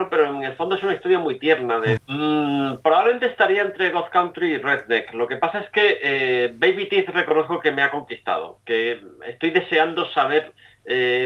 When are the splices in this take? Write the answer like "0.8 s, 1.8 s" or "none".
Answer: 2.0 s